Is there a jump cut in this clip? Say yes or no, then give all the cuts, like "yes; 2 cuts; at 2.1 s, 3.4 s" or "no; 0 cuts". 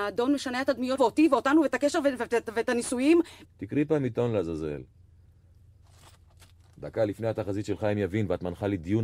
yes; 2 cuts; at 1.0 s, 3.4 s